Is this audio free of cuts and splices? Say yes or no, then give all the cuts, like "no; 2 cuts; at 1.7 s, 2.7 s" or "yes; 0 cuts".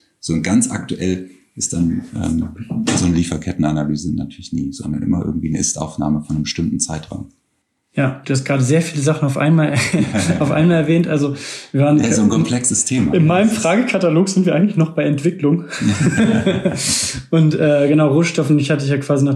yes; 0 cuts